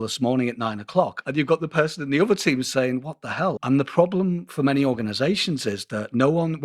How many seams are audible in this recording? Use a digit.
2